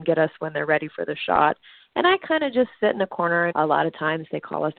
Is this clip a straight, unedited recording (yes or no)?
no